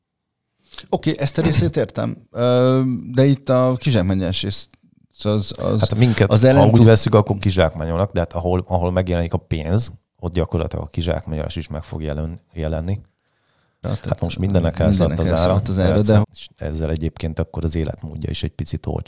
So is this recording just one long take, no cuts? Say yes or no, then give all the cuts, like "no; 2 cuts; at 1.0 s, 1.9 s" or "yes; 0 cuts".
no; 2 cuts; at 13.8 s, 16.2 s